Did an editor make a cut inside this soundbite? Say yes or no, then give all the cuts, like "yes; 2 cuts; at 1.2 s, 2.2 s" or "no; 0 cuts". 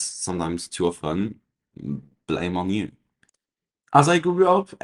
no; 0 cuts